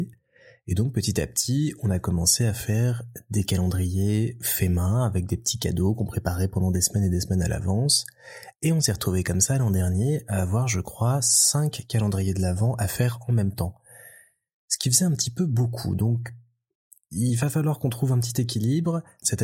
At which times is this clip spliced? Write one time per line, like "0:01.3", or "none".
none